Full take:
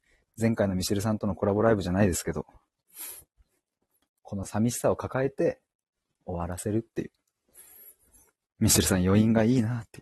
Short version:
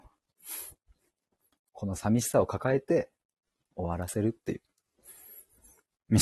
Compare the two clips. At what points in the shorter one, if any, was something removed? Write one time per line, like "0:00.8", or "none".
none